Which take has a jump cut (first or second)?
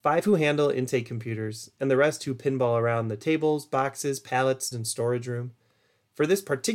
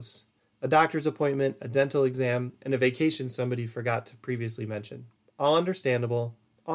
first